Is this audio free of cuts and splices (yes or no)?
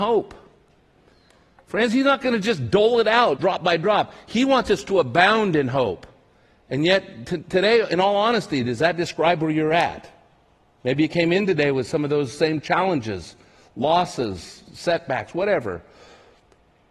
no